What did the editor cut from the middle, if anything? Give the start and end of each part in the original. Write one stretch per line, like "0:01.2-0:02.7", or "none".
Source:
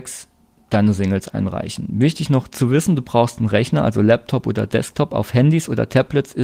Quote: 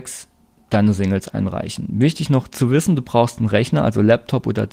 none